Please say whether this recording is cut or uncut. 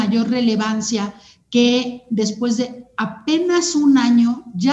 uncut